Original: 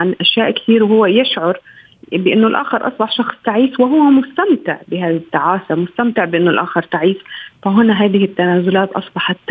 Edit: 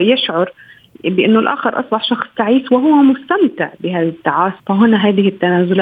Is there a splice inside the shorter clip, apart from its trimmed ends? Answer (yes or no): yes